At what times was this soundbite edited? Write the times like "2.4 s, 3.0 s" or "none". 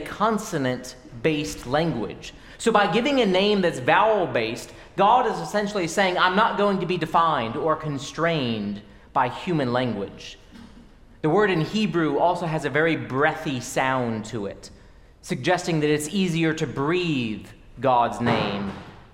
none